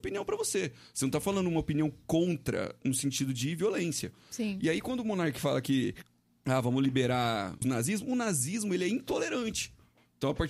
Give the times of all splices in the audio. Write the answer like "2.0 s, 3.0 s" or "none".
7.6 s